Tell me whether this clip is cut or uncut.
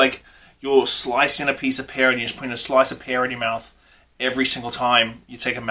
uncut